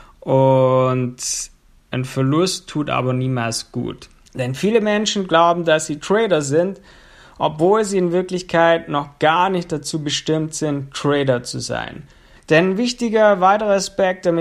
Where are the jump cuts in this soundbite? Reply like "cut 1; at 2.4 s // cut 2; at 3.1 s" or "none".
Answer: cut 1; at 4.3 s // cut 2; at 12.4 s